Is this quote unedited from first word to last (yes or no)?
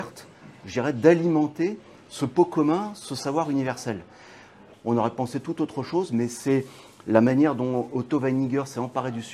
no